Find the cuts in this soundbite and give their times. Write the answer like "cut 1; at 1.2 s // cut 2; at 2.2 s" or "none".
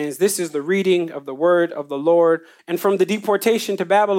cut 1; at 2.6 s